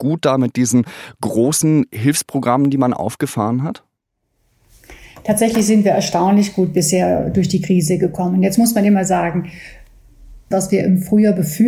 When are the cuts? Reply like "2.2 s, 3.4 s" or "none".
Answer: 10.5 s